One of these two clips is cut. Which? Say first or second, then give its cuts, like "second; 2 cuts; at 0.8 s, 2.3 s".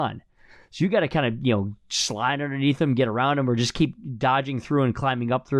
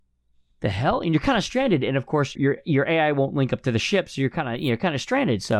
second; 1 cut; at 2.4 s